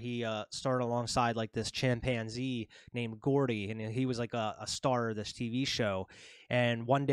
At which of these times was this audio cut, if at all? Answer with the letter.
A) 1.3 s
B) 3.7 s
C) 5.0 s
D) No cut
D